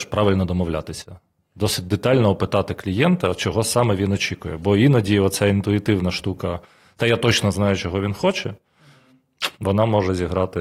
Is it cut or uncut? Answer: uncut